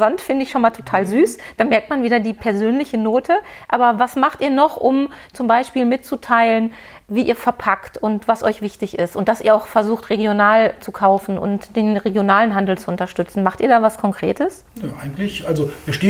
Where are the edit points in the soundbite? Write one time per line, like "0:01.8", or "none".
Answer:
0:14.7